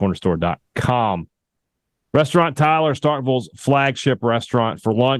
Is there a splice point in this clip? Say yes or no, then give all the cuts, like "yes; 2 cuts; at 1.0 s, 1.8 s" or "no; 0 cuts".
no; 0 cuts